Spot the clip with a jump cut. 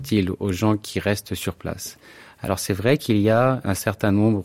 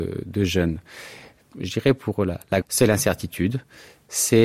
second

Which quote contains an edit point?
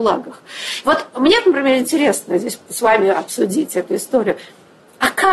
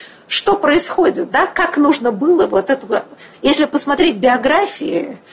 second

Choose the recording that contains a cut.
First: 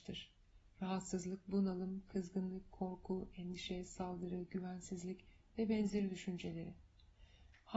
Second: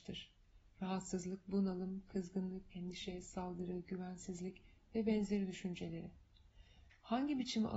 second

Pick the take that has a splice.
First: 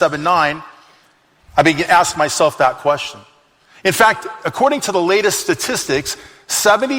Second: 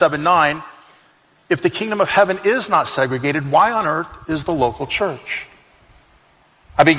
first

